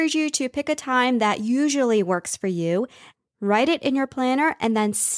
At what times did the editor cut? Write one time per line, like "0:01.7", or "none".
none